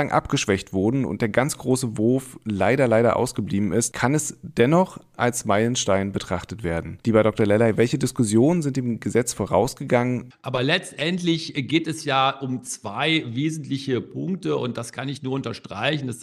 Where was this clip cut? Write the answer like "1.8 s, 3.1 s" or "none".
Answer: 10.3 s